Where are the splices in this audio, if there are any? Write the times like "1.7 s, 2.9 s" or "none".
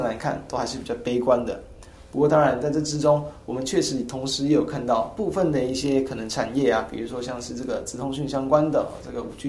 none